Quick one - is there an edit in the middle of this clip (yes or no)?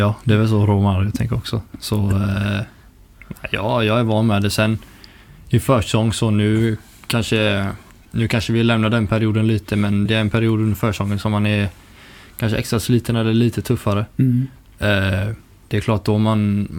yes